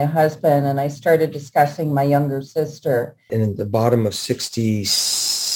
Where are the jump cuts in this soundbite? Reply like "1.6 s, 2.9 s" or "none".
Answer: 3.3 s